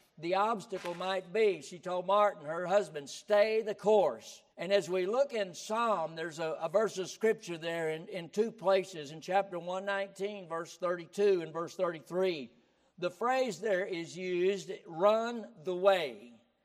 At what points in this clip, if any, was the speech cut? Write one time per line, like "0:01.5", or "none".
0:04.5